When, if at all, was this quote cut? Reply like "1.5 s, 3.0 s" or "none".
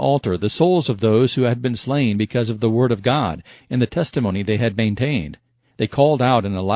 none

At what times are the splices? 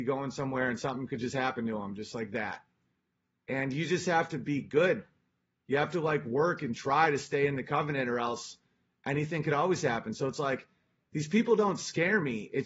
none

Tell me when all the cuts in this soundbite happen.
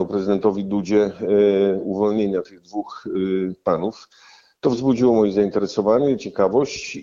none

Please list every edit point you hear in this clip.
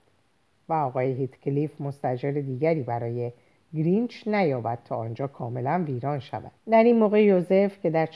6.6 s

